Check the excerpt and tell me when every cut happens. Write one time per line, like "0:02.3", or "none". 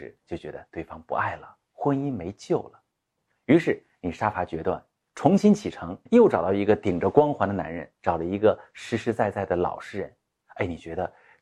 0:03.3
0:06.1
0:08.0